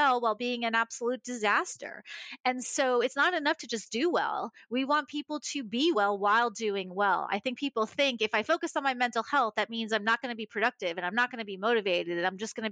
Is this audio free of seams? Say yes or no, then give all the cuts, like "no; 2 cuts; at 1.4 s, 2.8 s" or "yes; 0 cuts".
yes; 0 cuts